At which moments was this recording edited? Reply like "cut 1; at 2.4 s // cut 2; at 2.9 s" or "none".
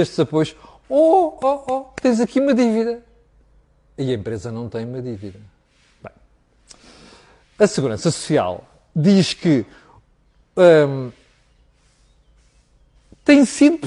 cut 1; at 1.4 s